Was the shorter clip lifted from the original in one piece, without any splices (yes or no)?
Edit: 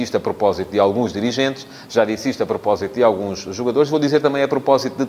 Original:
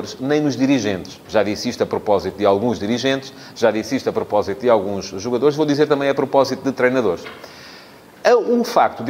yes